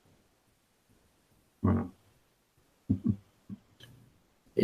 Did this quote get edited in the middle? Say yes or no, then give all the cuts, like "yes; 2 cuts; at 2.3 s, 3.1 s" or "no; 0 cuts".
no; 0 cuts